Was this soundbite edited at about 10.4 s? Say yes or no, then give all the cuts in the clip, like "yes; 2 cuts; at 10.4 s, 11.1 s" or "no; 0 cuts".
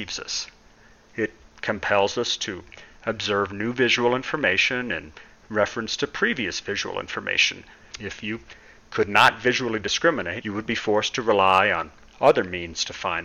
yes; 2 cuts; at 7.9 s, 10.4 s